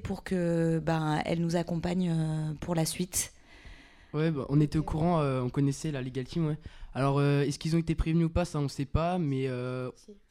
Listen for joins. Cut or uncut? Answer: uncut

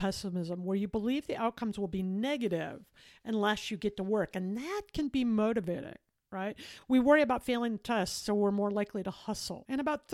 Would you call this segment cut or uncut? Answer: uncut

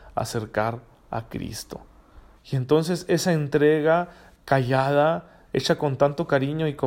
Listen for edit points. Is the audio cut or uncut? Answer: cut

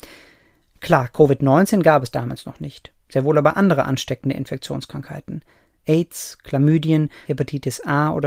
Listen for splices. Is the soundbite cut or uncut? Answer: cut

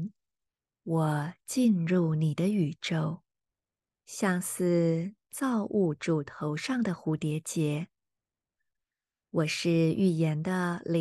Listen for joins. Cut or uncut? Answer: cut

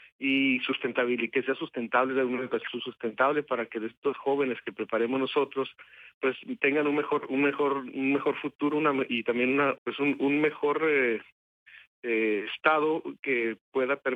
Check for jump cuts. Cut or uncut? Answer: cut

